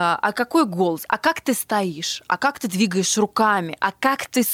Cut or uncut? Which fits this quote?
uncut